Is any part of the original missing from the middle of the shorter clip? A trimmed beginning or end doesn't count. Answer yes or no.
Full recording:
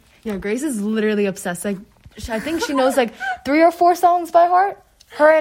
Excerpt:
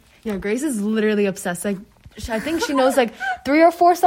no